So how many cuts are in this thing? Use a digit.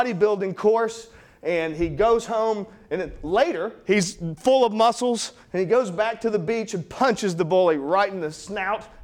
0